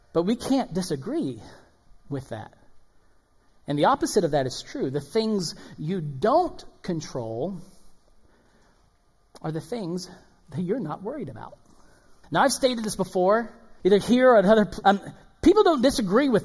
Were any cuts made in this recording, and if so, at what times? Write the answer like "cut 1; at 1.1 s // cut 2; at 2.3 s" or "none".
cut 1; at 12.2 s // cut 2; at 13.8 s // cut 3; at 14.8 s